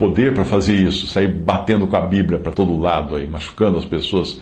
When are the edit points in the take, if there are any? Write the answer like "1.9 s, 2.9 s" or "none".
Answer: 2.5 s